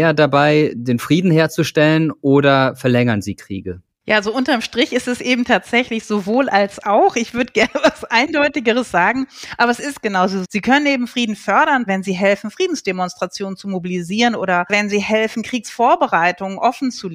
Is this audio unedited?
no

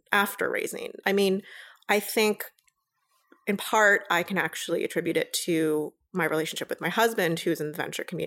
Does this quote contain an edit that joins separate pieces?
yes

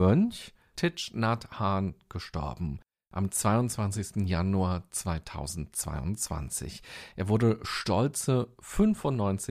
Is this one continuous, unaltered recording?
yes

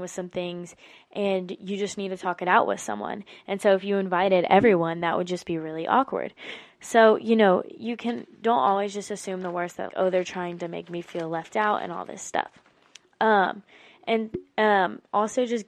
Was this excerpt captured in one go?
no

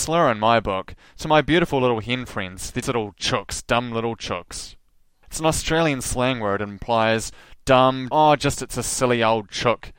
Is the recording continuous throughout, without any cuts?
no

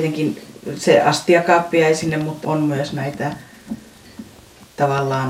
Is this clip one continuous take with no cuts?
no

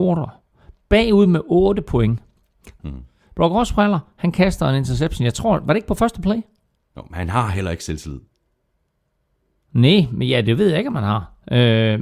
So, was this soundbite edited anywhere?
yes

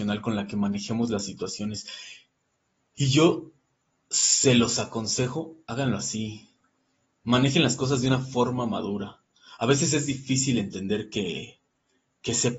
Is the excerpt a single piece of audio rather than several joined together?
yes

